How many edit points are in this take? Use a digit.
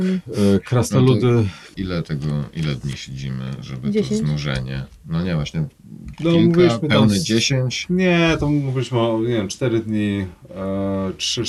1